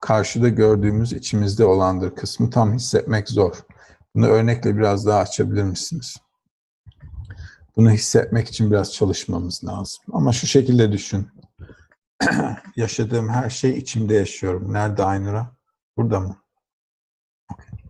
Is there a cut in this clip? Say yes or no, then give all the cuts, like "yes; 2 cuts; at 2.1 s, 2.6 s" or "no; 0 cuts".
no; 0 cuts